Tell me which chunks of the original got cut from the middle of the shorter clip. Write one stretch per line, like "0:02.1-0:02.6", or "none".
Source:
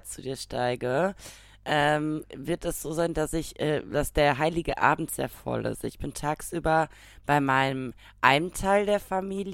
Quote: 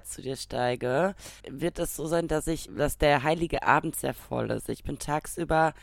0:01.4-0:02.3
0:03.5-0:03.8

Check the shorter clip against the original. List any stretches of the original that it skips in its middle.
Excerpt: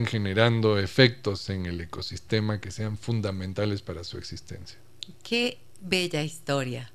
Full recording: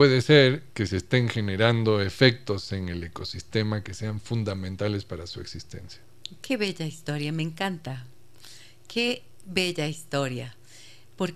0:06.4-0:08.8

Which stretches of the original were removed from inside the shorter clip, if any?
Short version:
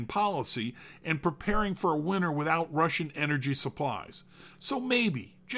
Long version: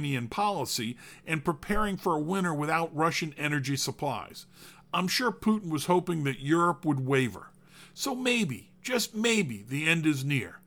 0:04.8-0:07.9

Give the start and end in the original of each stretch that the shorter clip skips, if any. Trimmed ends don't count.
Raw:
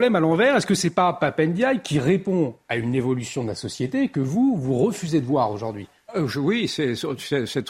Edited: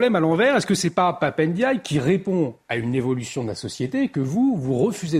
none

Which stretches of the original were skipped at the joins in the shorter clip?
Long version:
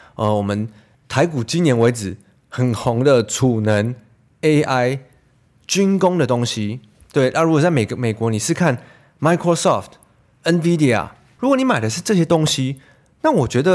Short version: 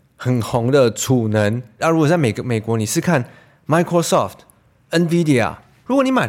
0:04.1-0:07.3

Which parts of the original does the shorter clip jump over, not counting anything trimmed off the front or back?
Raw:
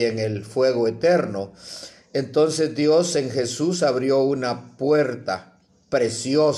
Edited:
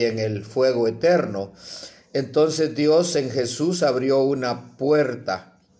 none

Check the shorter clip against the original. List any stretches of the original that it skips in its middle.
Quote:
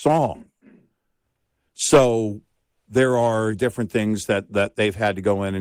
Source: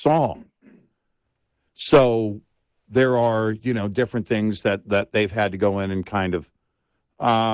0:03.5-0:03.9

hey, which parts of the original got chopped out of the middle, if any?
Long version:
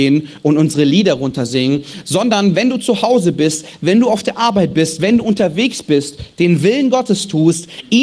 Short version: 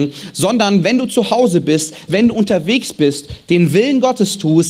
0:03.8-0:05.0

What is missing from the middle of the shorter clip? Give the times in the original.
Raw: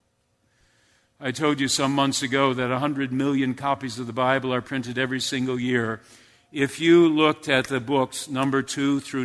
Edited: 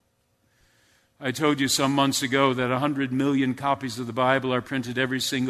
none

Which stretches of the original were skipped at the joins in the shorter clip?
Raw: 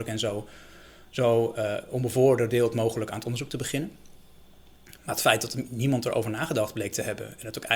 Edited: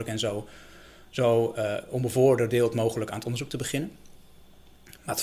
none

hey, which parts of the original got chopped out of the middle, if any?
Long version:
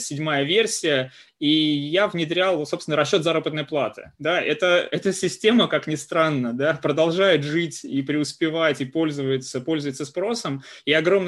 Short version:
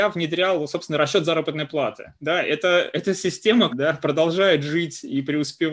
0:05.7-0:06.5

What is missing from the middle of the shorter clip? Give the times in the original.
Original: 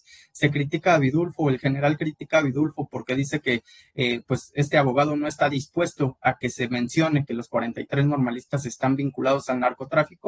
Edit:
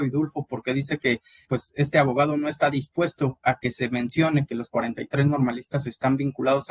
0:03.9-0:04.2

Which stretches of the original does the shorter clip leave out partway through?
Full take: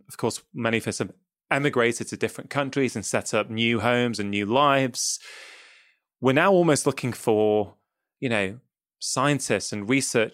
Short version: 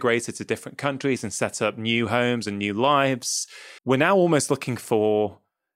0:05.5-0:06.1

